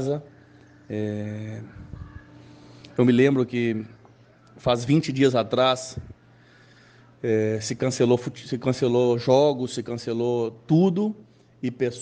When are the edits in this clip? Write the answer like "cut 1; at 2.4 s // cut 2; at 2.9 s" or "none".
none